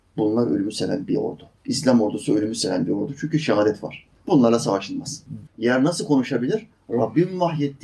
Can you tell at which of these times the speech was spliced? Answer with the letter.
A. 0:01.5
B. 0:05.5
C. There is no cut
B